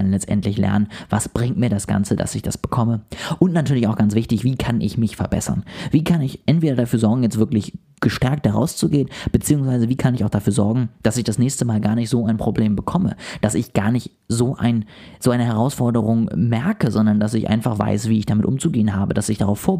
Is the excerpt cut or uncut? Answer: uncut